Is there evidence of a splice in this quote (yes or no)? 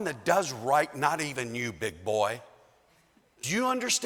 no